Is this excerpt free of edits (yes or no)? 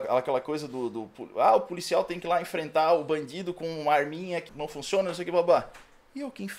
no